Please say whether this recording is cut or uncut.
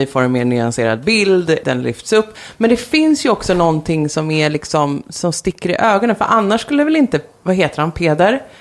cut